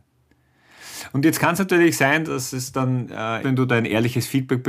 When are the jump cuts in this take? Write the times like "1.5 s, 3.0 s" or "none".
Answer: 2.2 s, 3.4 s